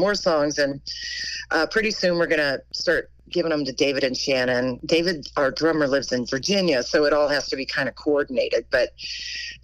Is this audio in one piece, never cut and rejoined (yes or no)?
yes